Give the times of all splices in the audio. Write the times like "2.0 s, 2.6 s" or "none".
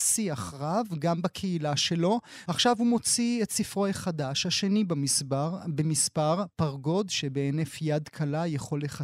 2.5 s, 6.5 s